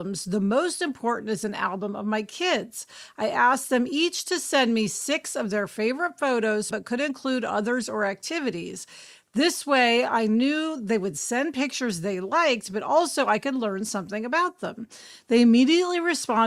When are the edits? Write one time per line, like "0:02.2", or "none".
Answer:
0:06.7